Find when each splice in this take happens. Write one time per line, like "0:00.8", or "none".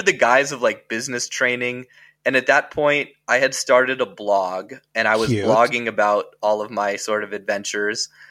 none